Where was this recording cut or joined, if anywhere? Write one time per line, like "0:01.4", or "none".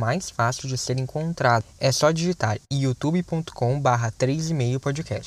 none